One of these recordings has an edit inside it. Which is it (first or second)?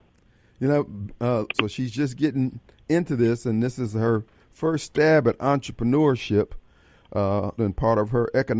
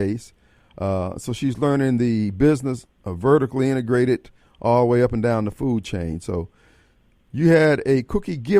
first